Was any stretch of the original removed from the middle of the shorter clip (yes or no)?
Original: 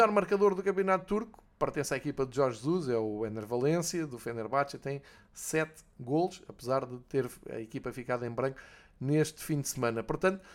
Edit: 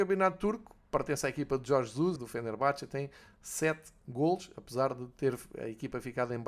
yes